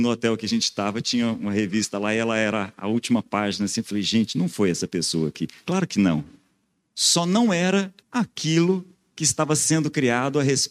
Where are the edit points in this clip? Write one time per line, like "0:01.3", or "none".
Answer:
0:06.9
0:08.0